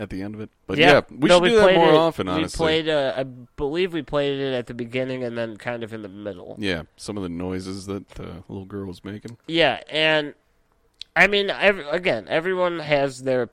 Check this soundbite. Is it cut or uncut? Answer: uncut